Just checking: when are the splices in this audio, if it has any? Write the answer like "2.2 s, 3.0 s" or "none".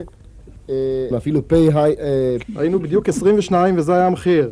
1.1 s, 2.4 s